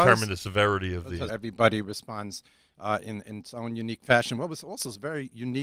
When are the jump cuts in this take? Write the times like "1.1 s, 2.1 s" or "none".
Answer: 1.3 s

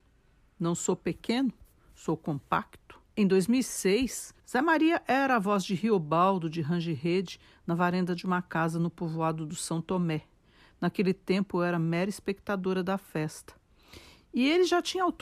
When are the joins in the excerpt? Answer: 3.0 s, 4.4 s

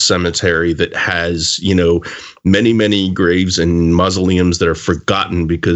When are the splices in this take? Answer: none

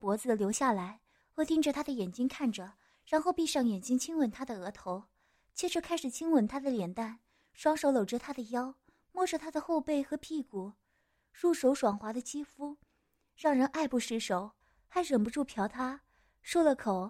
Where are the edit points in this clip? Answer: 1.2 s, 14.6 s

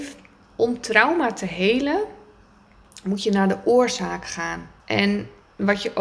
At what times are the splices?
4.8 s

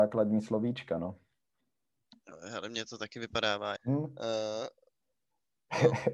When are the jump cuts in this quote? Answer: 3.8 s

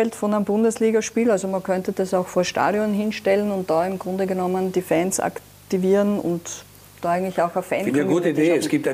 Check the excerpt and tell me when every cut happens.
none

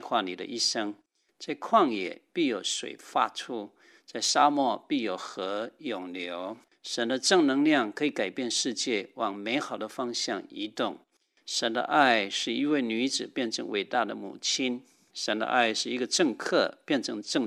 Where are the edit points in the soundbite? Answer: 1.3 s, 6.7 s, 11.4 s

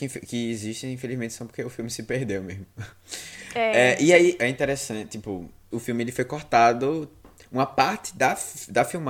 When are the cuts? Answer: 4.4 s, 5.7 s

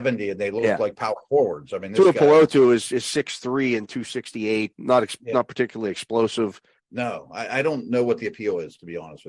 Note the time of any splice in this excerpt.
4.7 s, 6.8 s

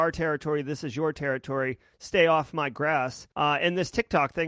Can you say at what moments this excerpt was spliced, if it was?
3.3 s

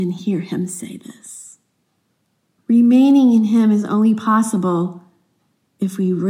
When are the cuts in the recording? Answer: 2.6 s

